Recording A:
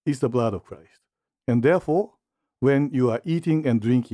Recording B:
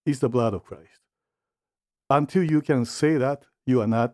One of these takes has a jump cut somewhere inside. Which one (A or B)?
A